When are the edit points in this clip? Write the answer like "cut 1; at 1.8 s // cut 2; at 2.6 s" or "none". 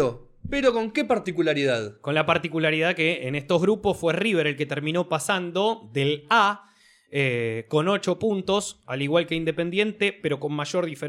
none